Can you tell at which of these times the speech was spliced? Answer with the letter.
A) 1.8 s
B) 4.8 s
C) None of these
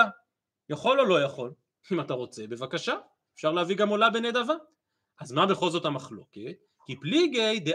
A